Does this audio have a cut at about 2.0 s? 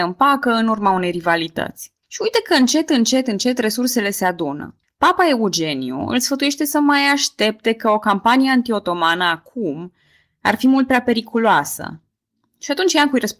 yes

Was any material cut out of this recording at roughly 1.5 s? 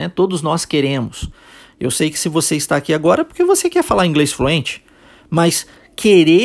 no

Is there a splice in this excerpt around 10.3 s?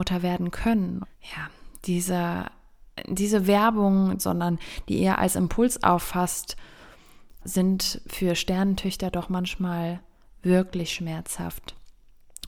no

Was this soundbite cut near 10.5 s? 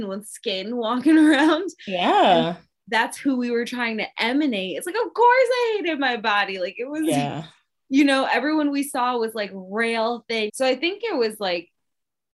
yes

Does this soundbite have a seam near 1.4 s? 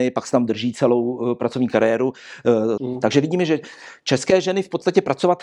no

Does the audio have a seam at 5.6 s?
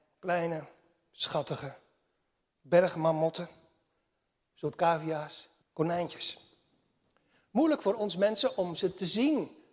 yes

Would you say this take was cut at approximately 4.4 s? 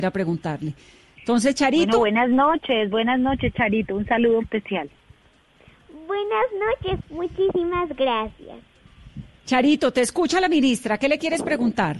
yes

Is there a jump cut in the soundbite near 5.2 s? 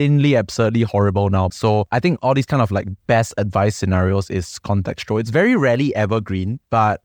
no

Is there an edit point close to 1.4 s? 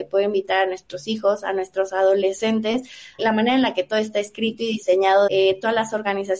no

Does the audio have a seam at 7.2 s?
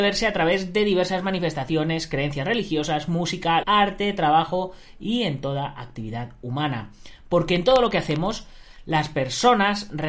no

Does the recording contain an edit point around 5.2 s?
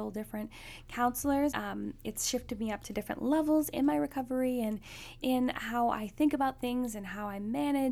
yes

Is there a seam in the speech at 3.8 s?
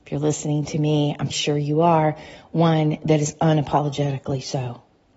no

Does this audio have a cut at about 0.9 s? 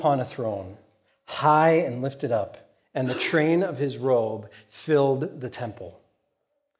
no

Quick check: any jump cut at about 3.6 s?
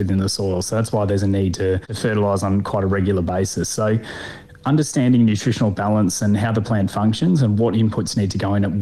no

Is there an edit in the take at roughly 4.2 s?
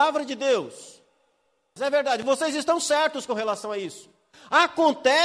no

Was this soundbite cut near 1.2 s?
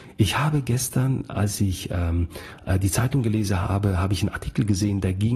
no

